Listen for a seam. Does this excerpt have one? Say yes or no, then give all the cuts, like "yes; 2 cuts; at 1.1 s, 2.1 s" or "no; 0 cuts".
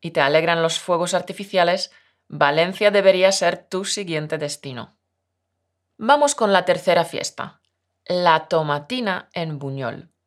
no; 0 cuts